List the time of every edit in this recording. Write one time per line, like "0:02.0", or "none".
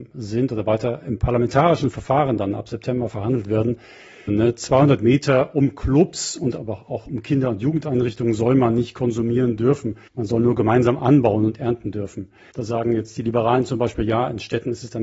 0:04.3
0:10.1
0:12.5